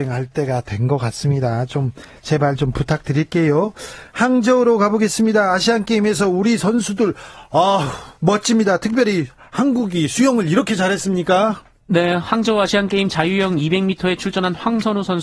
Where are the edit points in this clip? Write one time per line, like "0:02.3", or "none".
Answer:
0:08.2